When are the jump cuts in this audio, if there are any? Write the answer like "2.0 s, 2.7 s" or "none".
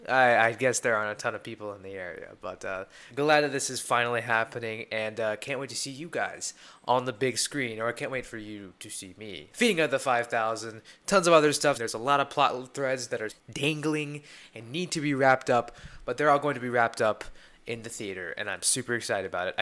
9.5 s, 11.7 s, 13.3 s